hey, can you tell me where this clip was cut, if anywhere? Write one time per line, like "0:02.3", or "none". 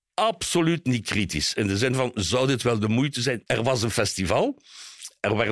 0:03.5